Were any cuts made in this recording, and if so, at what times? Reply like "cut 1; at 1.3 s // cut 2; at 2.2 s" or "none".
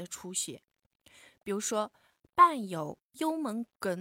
none